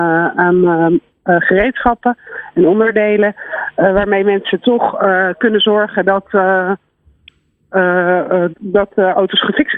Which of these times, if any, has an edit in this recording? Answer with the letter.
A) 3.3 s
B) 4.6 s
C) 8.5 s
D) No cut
C